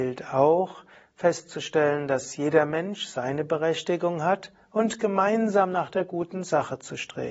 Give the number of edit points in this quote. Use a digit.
0